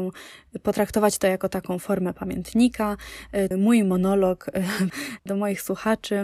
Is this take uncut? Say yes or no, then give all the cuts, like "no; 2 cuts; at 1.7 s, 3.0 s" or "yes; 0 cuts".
no; 2 cuts; at 3.5 s, 5.3 s